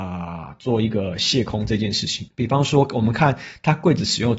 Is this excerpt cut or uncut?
cut